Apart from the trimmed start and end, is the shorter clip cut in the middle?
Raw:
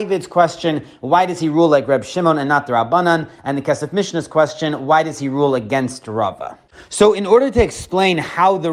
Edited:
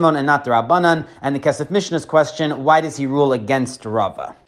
no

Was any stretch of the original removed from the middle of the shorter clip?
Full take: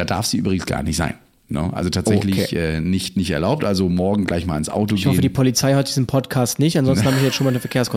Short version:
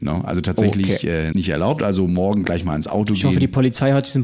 yes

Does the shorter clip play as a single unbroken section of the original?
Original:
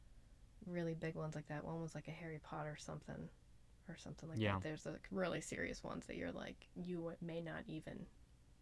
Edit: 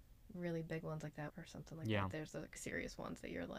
no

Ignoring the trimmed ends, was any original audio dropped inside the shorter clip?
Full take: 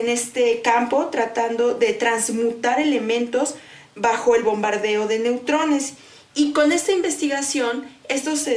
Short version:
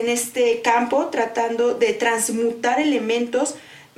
no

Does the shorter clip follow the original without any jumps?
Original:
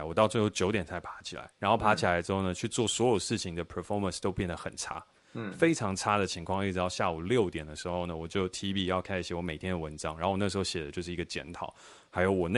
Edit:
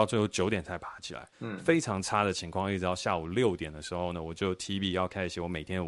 no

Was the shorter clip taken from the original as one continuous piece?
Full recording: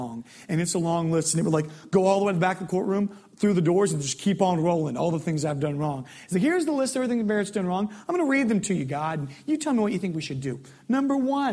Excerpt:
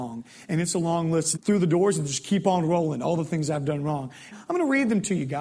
no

